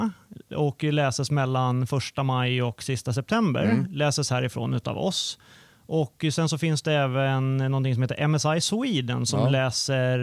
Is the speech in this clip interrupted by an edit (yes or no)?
no